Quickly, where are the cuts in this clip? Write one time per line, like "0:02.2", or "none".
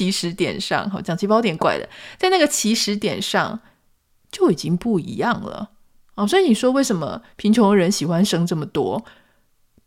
0:01.6